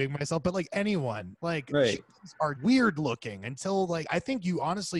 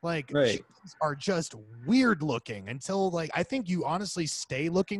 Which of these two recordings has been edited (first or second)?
first